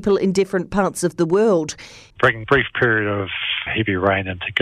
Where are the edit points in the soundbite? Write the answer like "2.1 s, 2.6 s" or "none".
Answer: 2.1 s, 3.7 s

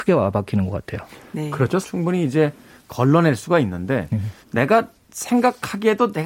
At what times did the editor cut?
1.8 s, 4.4 s

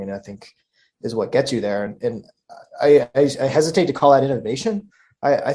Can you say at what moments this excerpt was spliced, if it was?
none

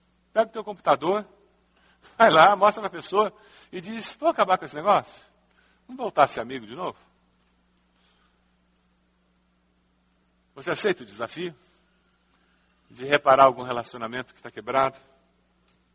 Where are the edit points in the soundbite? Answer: none

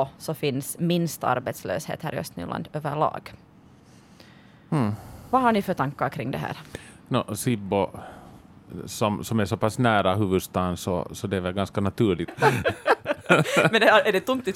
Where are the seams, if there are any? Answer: 12.3 s

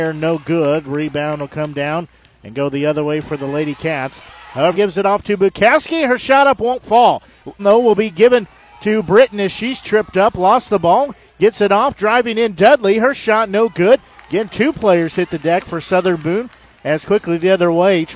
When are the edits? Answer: 4.7 s, 7.6 s

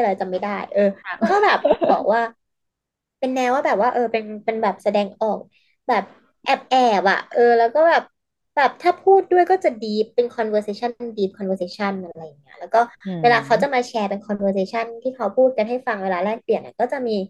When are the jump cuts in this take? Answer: none

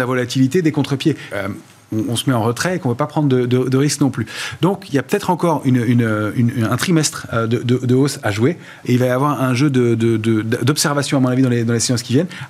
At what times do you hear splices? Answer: 1.3 s, 8.8 s

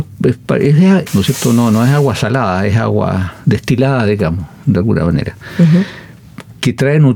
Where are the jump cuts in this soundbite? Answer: 1.1 s

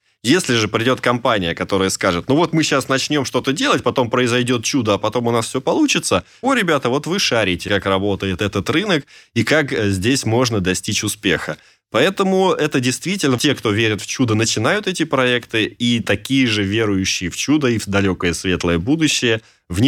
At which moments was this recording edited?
6.4 s, 7.7 s, 13.4 s

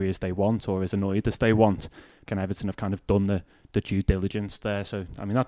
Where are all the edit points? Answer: 2.3 s

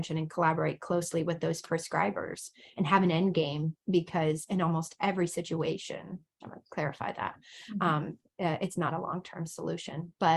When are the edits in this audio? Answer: 6.4 s

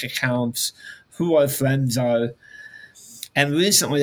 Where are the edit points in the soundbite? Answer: none

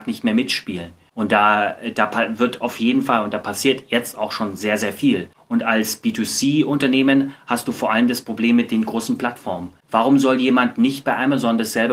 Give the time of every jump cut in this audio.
none

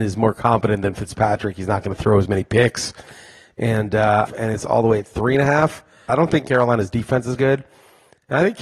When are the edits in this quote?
4.3 s, 6.1 s, 7.4 s

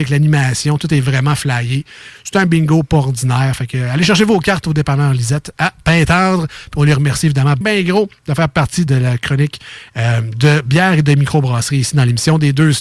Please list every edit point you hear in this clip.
7.6 s, 8.9 s

